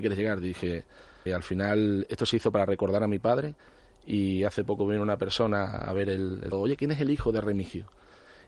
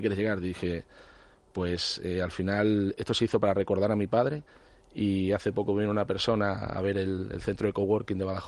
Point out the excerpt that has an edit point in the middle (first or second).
first